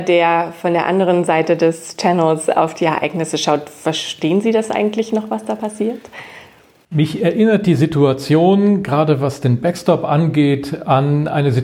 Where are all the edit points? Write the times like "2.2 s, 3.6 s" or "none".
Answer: none